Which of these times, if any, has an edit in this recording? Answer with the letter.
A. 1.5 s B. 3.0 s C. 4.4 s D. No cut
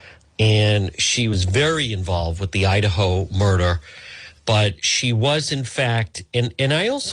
C